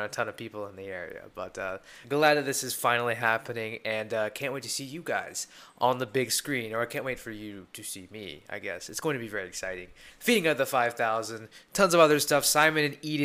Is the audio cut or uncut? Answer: uncut